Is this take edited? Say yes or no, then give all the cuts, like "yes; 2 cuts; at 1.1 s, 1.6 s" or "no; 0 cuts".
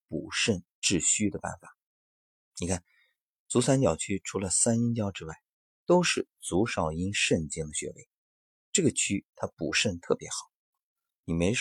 no; 0 cuts